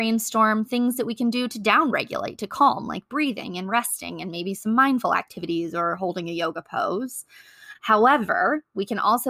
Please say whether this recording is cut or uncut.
cut